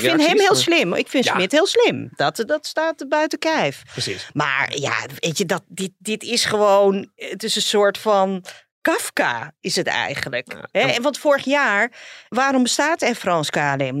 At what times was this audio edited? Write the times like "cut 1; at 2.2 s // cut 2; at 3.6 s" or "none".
cut 1; at 2.5 s